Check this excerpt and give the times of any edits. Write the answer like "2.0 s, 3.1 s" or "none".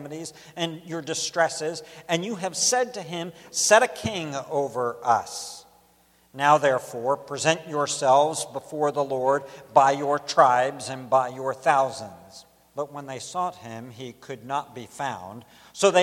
12.6 s

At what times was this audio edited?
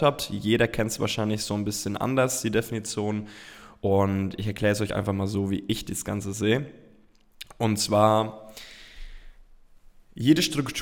none

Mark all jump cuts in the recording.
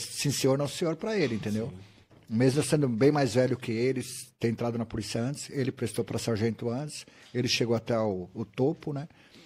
none

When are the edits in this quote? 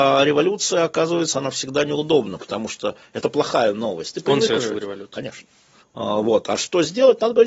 5.8 s

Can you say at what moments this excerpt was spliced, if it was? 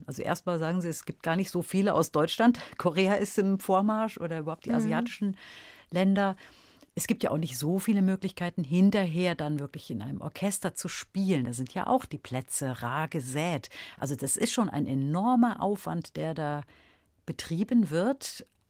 none

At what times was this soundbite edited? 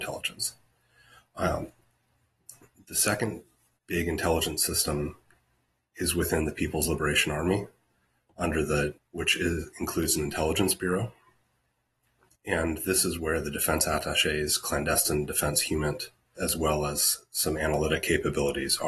9.0 s, 16.4 s

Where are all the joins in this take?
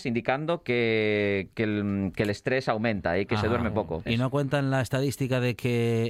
4.1 s

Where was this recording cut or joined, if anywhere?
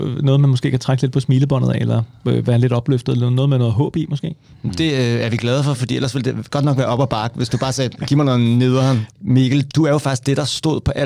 9.1 s

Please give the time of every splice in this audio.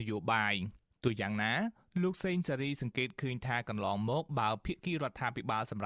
none

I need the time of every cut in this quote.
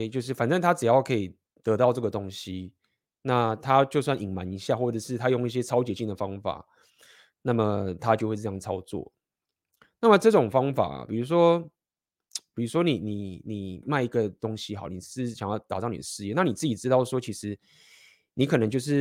13.8 s

